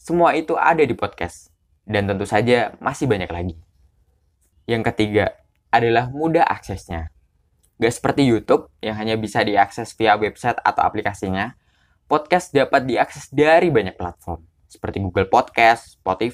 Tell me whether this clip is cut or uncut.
uncut